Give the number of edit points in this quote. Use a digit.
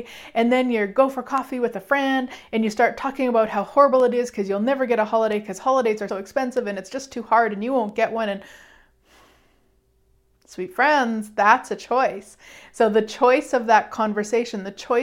1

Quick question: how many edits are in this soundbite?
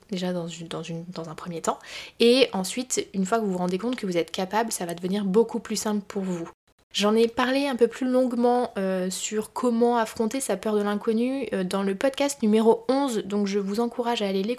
0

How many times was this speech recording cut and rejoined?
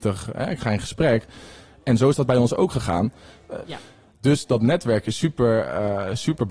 1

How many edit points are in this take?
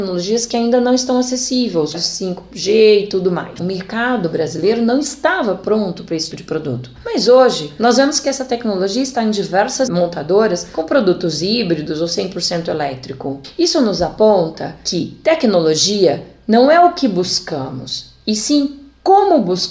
3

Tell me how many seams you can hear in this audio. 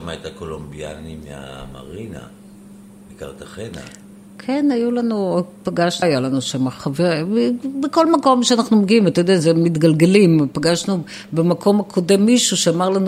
1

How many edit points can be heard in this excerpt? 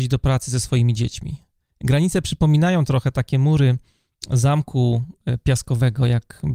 1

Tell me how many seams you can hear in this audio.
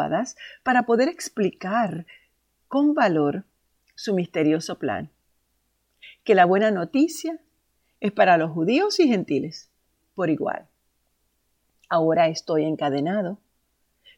0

